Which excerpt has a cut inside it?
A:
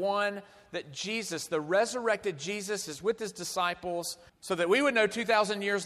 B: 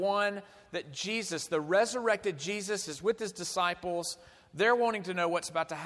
A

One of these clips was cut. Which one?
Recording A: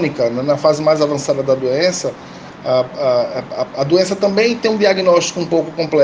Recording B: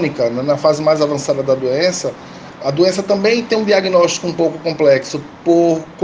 B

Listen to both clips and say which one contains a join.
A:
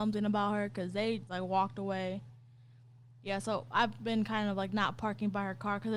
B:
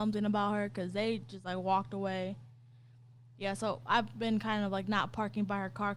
A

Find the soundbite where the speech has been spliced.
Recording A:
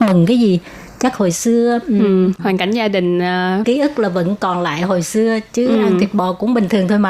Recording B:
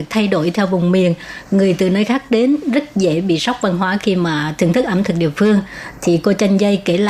A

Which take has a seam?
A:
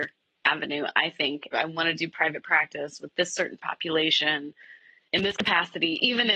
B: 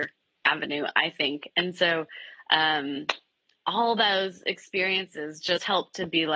A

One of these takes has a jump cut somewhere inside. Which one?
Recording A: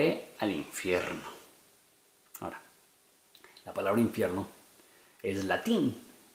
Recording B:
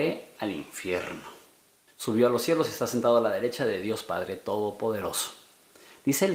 B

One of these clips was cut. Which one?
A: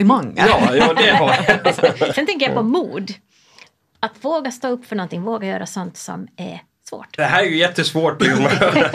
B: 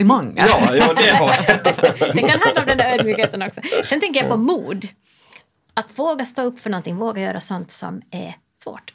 A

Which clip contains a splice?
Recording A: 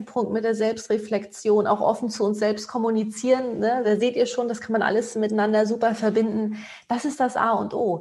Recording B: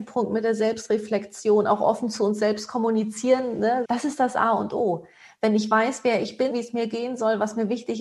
B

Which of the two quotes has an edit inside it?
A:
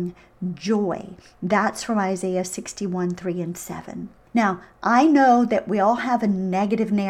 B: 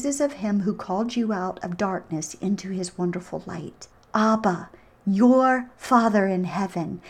B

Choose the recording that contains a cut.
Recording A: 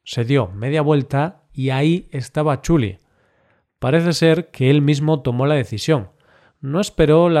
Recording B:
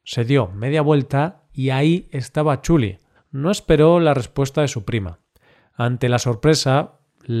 B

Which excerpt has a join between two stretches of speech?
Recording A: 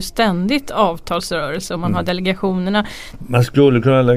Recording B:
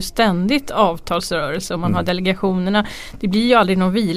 A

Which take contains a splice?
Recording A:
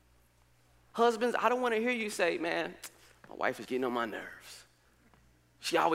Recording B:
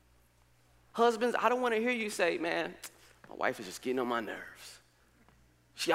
A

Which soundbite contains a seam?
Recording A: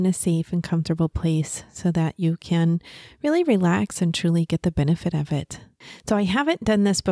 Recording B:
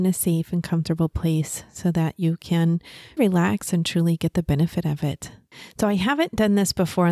B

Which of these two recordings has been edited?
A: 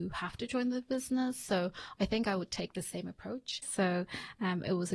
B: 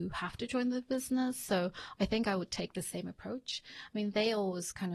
A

